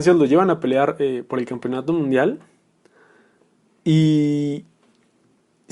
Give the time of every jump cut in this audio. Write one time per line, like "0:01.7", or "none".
none